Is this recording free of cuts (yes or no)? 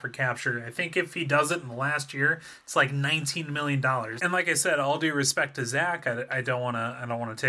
no